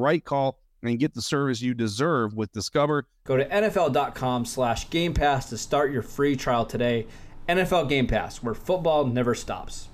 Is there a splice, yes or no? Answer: yes